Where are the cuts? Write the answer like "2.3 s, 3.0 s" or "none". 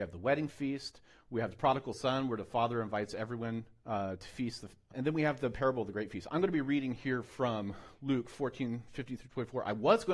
4.9 s